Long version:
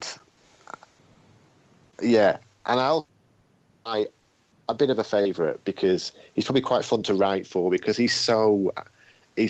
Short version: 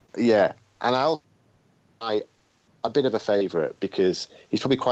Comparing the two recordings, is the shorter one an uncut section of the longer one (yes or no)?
yes